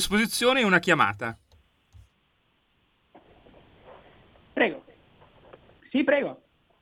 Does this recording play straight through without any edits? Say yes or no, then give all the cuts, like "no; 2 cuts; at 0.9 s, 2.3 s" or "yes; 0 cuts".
no; 1 cut; at 5.8 s